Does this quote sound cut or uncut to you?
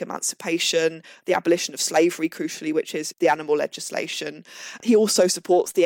cut